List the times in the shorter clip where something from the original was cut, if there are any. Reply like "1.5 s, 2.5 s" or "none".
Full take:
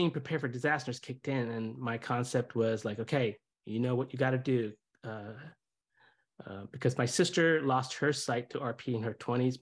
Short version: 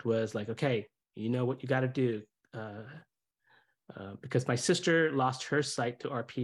none